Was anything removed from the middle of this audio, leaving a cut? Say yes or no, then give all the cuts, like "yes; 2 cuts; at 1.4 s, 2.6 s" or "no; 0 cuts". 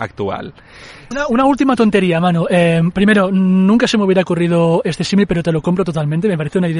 yes; 1 cut; at 1.1 s